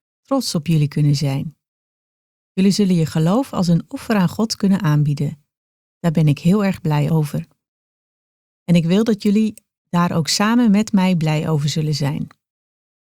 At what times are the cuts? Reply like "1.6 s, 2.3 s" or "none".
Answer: 8.4 s